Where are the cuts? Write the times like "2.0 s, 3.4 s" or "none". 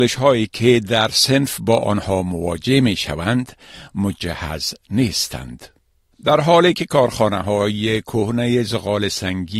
none